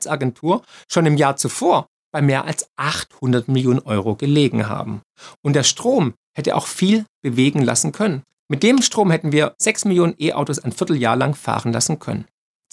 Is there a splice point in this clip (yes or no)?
no